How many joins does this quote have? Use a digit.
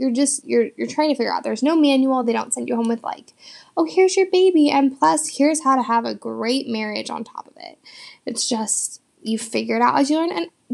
0